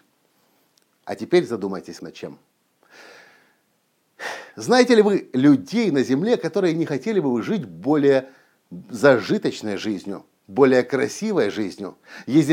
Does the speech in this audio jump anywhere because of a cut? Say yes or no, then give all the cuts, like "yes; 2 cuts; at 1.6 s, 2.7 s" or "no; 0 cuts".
yes; 1 cut; at 2.0 s